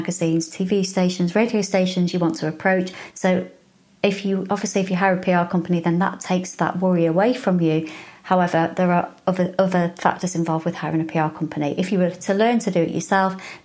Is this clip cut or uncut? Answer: cut